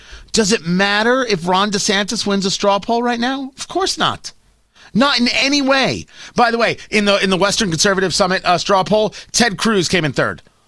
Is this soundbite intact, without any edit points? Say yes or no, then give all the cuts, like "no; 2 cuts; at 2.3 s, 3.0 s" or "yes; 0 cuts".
yes; 0 cuts